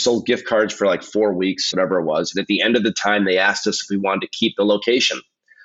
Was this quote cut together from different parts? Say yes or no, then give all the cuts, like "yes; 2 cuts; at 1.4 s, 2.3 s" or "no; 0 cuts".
yes; 1 cut; at 1.7 s